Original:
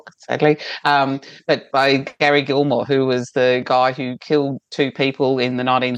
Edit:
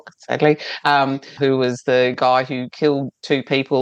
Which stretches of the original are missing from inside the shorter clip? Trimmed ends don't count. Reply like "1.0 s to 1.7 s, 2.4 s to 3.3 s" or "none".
1.4 s to 2.9 s